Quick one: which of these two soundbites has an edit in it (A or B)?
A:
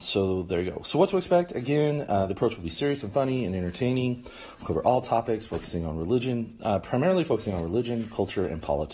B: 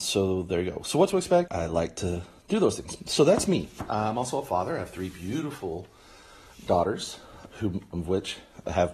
B